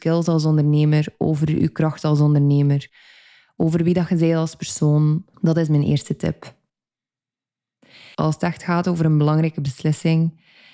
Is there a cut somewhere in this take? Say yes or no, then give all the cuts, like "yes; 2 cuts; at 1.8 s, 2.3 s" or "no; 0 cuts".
yes; 2 cuts; at 5.3 s, 8.1 s